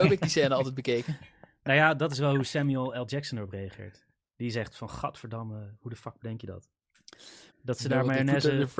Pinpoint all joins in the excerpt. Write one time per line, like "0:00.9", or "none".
0:07.5